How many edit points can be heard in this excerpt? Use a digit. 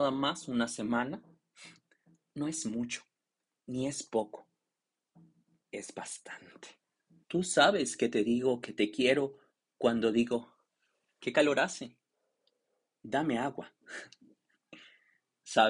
1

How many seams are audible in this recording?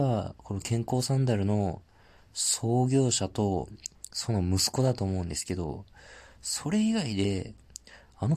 0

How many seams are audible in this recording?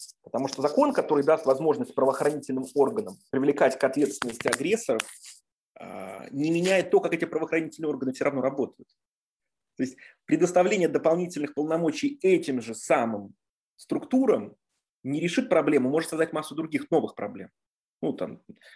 0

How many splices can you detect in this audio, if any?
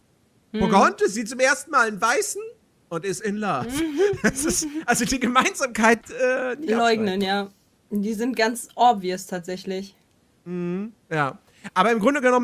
1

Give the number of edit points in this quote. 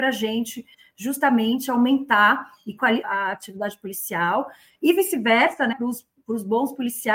2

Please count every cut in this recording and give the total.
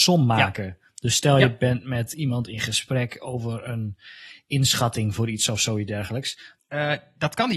1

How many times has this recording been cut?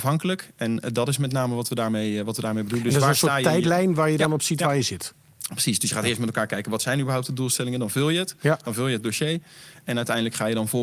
0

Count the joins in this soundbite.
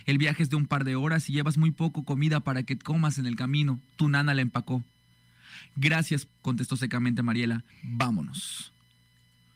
2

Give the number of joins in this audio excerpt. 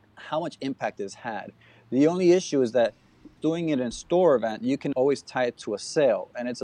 2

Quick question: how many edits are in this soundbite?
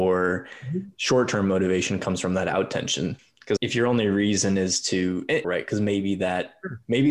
2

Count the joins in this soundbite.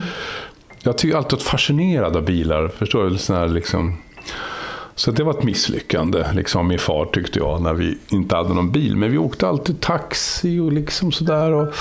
0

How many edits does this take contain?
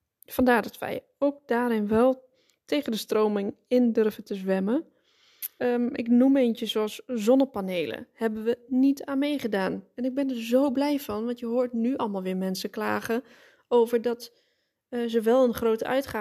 1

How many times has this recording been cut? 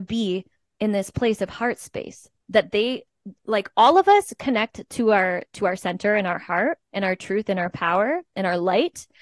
2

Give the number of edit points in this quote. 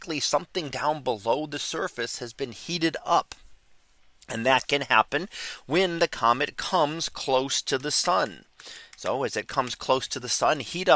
0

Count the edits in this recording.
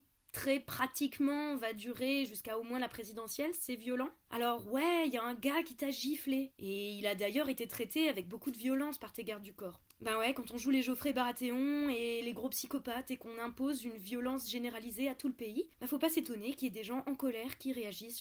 2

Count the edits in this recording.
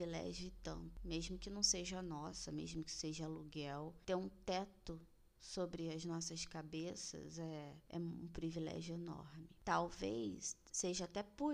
0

